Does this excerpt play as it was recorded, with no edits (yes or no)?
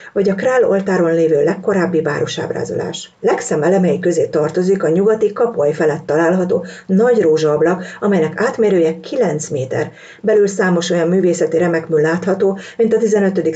no